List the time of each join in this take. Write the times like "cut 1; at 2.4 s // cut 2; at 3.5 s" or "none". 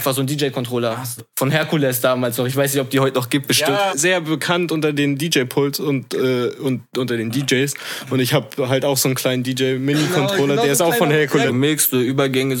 cut 1; at 1.2 s // cut 2; at 3.9 s // cut 3; at 11.5 s